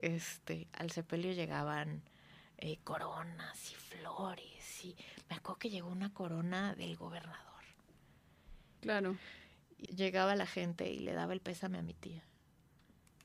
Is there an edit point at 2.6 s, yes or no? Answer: no